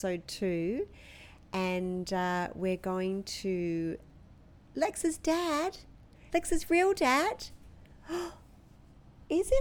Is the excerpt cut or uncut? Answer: cut